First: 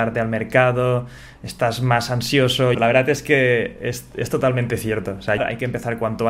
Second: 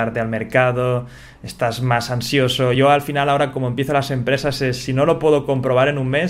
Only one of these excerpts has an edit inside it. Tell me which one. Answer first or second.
first